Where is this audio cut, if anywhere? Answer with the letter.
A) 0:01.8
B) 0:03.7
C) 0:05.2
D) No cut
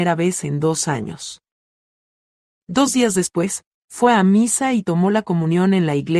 B